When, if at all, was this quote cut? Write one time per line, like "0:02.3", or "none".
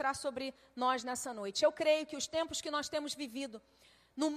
none